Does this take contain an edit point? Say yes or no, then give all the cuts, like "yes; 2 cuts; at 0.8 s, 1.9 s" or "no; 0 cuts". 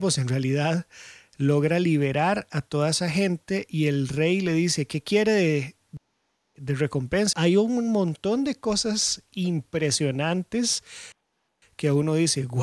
yes; 1 cut; at 7.3 s